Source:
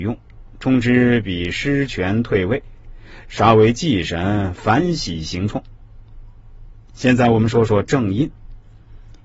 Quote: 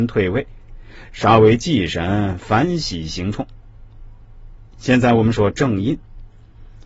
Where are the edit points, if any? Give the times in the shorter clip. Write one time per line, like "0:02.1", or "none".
0:05.3